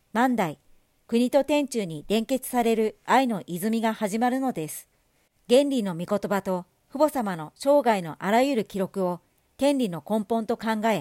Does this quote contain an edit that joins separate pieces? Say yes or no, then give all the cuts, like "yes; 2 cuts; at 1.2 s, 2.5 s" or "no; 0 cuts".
yes; 1 cut; at 5.3 s